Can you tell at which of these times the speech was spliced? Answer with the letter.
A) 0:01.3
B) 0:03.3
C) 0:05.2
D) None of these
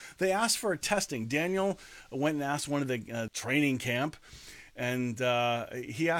B